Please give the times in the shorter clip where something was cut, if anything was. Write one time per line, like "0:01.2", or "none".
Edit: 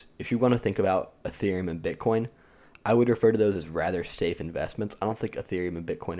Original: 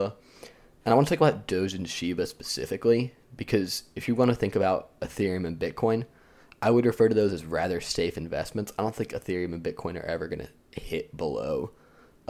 none